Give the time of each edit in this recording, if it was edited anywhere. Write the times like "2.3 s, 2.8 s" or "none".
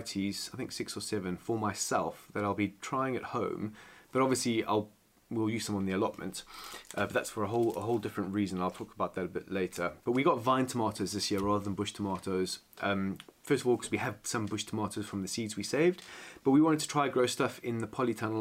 none